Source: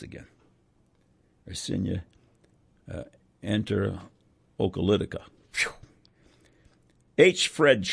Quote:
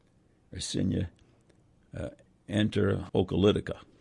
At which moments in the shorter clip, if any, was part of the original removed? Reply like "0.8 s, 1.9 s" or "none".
3.1 s